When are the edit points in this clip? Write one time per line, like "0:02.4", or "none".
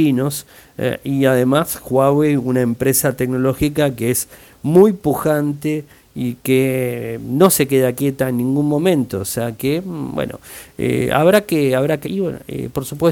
0:12.0